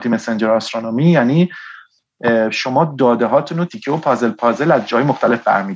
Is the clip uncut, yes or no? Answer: no